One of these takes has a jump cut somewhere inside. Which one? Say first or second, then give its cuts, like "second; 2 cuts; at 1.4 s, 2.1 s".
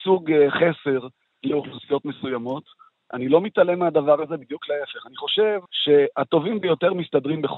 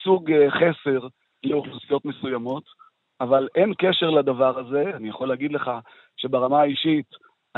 first; 2 cuts; at 3.1 s, 5.7 s